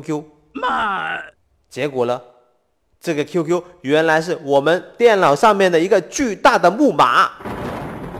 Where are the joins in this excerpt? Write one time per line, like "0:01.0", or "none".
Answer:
none